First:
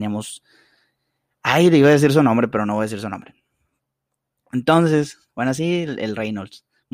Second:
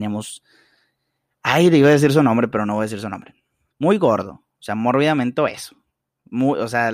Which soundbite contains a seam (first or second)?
second